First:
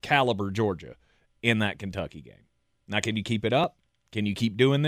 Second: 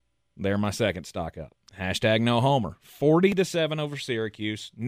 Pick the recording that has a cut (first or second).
second